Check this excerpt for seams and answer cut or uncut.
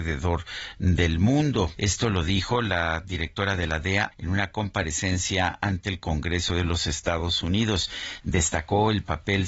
cut